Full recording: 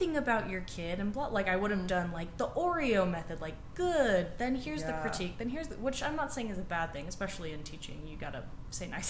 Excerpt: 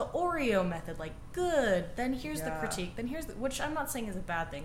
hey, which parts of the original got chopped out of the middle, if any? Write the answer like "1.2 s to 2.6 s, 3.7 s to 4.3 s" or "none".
none